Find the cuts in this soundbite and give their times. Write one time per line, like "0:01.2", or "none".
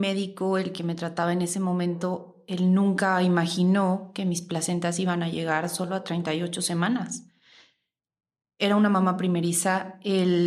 0:08.4